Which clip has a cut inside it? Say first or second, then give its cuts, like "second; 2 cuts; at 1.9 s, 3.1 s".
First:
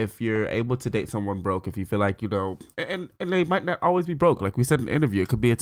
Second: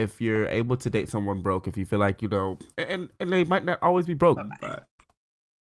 second; 1 cut; at 4.4 s